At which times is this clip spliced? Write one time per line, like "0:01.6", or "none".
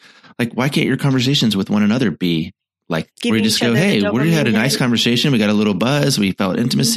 0:03.1